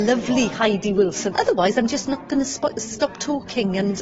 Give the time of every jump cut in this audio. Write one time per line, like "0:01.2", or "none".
0:01.3